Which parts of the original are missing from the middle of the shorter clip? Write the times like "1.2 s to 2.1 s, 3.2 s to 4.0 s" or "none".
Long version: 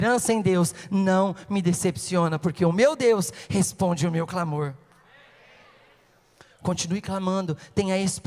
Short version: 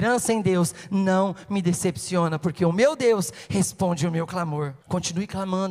4.8 s to 6.5 s